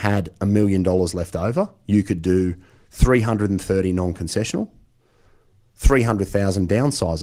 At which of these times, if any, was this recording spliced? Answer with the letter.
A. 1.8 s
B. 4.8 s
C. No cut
C